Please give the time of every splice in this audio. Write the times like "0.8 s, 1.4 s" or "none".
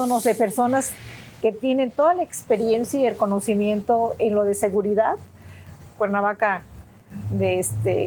6.0 s